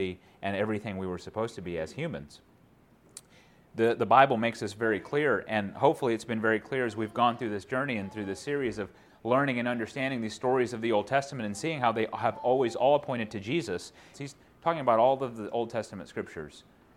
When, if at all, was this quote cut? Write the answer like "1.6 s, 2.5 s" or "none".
14.1 s